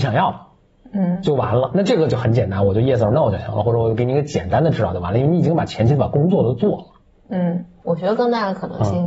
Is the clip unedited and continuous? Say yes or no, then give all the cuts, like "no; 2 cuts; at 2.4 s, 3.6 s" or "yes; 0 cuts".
yes; 0 cuts